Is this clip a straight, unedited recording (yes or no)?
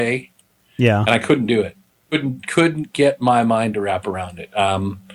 yes